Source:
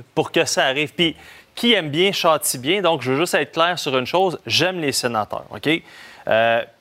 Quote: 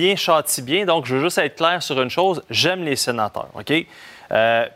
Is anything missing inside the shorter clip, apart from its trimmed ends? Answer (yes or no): no